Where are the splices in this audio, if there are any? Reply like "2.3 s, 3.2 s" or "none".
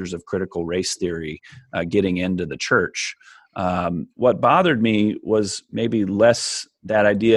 4.1 s